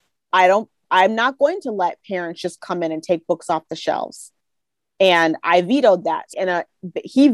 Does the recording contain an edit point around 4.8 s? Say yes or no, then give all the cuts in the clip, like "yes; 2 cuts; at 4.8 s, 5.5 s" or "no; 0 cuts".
no; 1 cut; at 6.3 s